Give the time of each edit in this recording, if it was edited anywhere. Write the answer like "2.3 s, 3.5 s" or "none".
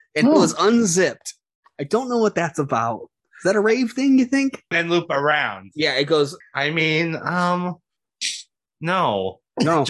4.7 s, 6.4 s, 8.7 s

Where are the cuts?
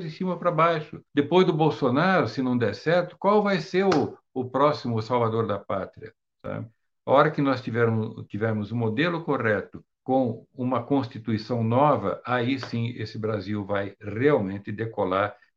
1.1 s, 6.3 s, 9.9 s

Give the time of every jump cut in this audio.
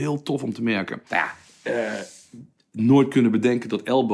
1.1 s

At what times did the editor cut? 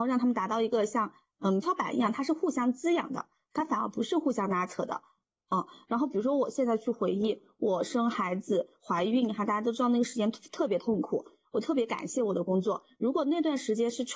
1.6 s

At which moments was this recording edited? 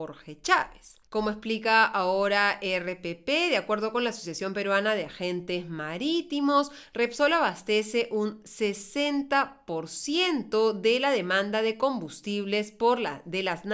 1.0 s

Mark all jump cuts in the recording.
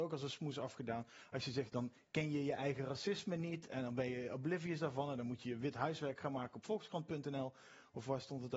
1.7 s

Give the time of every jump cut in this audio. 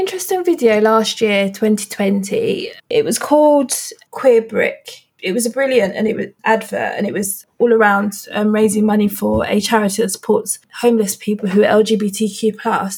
2.8 s

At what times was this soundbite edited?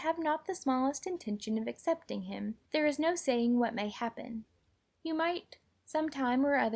2.7 s

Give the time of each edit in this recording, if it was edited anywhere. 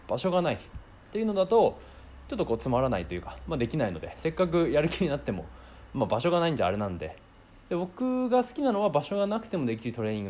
none

